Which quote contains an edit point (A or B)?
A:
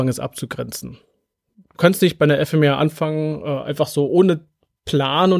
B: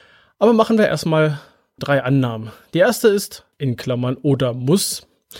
B